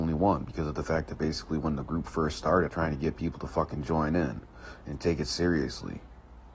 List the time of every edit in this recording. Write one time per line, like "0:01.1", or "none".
0:02.7